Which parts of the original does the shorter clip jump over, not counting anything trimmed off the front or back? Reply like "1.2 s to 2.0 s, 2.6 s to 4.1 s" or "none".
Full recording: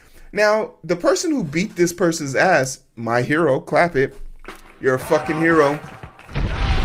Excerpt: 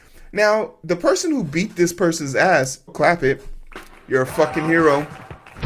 2.9 s to 3.6 s